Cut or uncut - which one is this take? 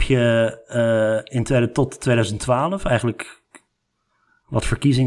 uncut